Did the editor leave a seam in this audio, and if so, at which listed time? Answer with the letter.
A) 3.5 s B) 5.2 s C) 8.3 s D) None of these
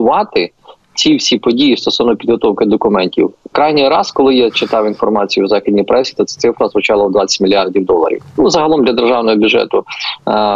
A